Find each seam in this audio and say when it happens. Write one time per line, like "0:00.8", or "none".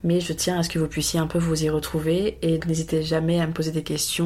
0:02.6